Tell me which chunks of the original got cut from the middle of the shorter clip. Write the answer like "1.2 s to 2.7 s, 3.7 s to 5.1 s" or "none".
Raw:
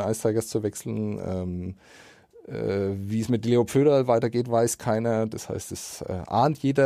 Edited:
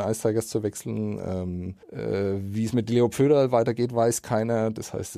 1.8 s to 2.4 s